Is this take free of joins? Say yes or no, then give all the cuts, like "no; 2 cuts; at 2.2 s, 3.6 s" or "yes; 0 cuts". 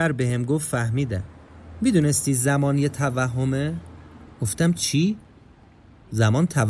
yes; 0 cuts